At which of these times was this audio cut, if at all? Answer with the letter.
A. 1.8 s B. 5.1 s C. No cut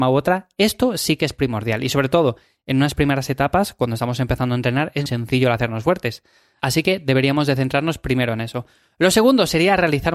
B